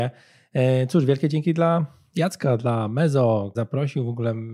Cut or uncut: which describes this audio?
cut